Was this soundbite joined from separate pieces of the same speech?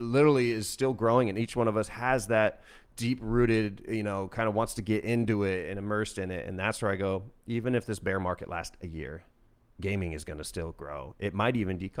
no; 0 cuts

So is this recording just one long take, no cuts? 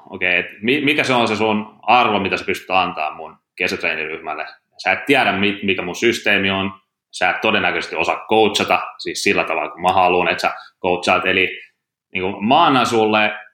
yes; 0 cuts

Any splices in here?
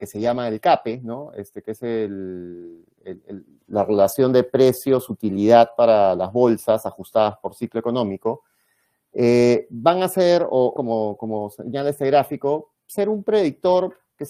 yes; 2 cuts; at 10.8 s, 12.7 s

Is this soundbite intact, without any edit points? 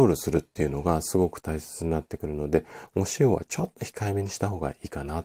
yes; 0 cuts

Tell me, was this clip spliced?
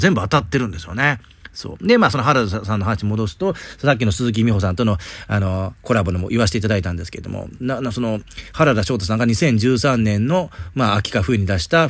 no; 0 cuts

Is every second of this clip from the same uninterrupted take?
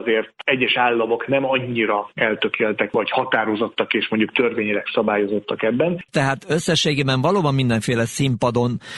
no; 1 cut; at 6.1 s

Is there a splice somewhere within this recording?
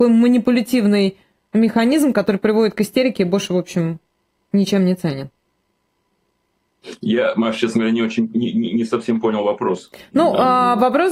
no; 0 cuts

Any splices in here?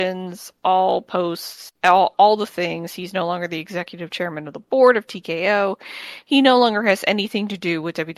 no; 0 cuts

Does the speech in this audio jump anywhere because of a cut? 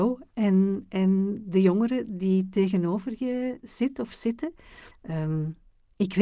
yes; 1 cut; at 4.9 s

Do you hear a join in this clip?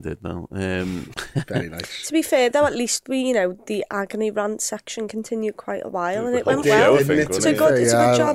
yes; 1 cut; at 1.1 s

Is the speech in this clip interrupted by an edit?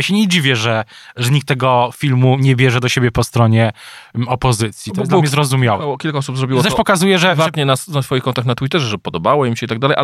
no; 0 cuts

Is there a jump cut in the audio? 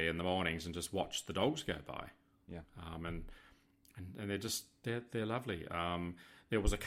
no; 0 cuts

